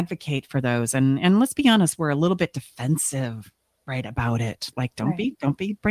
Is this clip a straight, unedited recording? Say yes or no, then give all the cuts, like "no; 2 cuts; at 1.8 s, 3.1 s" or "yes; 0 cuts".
yes; 0 cuts